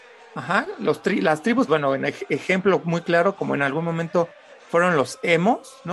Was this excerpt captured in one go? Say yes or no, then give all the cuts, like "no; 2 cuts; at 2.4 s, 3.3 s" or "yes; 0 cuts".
no; 1 cut; at 1.7 s